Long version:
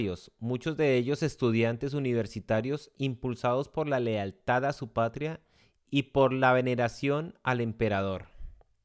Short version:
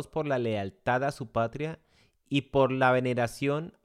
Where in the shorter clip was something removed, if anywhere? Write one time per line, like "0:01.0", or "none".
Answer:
none

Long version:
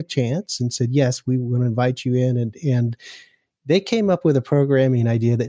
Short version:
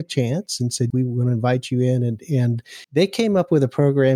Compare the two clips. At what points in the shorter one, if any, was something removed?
0:00.9
0:02.8

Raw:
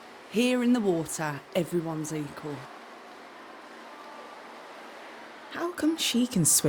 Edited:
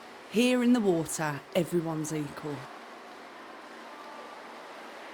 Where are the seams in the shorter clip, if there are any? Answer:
none

